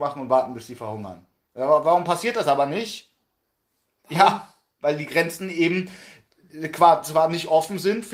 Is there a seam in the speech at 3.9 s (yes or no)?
no